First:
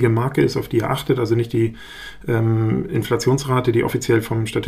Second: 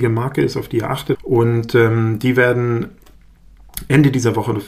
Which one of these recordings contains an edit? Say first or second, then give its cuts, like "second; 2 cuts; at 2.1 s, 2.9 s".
second; 1 cut; at 1.1 s